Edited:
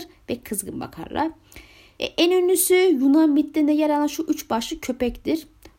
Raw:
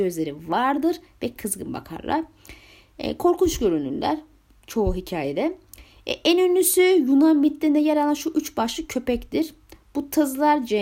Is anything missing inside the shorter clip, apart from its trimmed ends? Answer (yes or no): yes